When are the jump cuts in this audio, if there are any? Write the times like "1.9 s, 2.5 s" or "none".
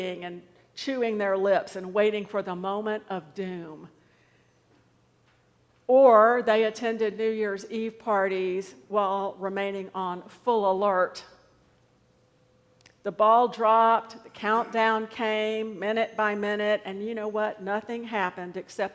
none